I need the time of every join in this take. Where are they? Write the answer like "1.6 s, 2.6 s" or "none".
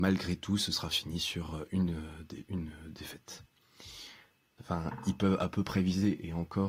4.6 s